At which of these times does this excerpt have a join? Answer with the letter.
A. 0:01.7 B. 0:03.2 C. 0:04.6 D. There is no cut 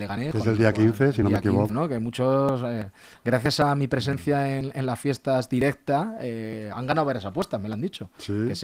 A